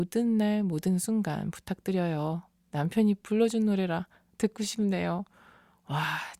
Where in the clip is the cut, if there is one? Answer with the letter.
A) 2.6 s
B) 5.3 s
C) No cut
C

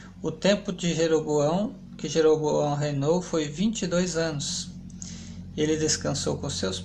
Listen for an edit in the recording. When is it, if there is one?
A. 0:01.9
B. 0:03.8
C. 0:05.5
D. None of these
D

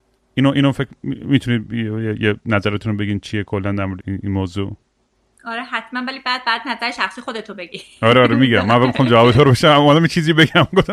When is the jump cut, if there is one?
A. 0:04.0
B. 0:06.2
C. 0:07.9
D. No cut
A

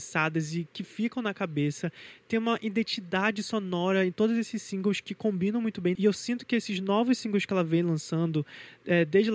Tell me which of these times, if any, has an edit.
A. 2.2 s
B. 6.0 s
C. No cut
B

